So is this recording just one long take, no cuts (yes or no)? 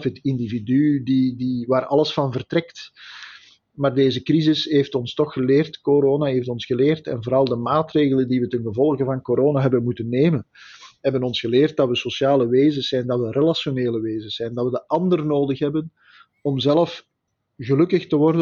yes